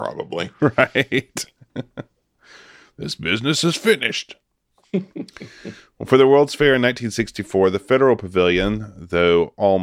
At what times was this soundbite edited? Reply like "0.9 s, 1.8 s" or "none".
none

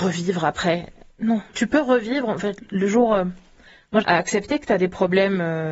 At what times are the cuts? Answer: 1.5 s, 4.0 s

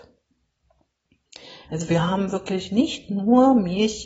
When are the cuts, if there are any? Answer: 1.6 s

